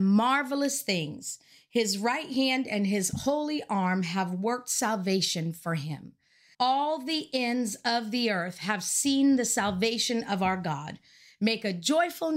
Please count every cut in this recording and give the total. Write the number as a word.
one